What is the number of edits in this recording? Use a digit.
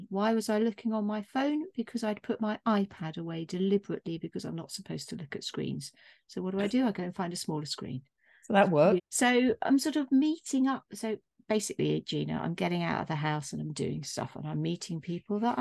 1